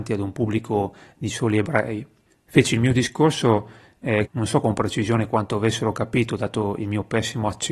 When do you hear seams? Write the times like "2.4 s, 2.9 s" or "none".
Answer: 2.3 s, 4.3 s